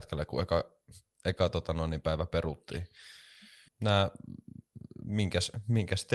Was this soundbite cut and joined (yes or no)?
yes